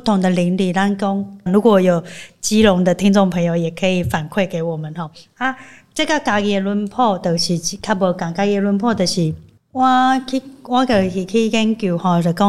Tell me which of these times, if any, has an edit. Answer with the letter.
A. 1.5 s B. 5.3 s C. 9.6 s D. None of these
A